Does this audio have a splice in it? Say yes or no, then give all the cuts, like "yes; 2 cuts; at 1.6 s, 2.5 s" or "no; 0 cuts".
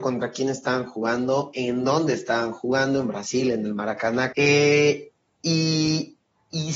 yes; 1 cut; at 4.3 s